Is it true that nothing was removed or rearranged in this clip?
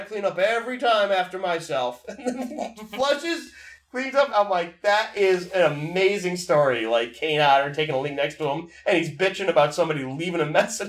no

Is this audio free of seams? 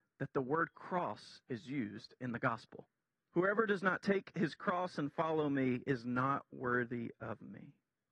no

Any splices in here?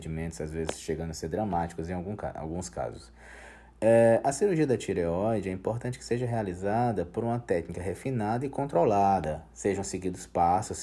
no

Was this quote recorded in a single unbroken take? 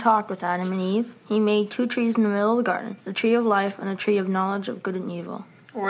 no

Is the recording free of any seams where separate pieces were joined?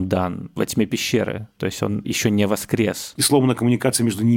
no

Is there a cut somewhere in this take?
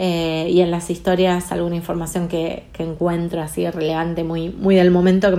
no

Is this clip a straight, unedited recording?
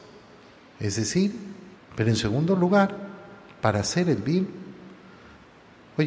no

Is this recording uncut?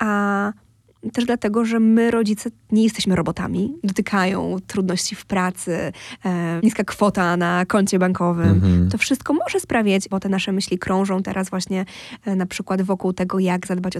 no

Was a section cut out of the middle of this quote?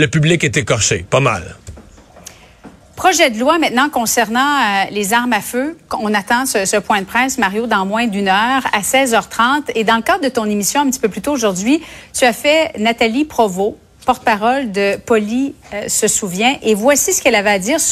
no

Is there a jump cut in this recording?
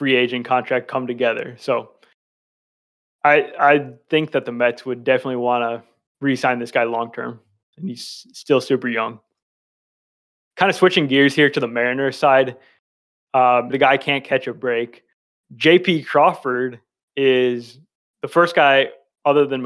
yes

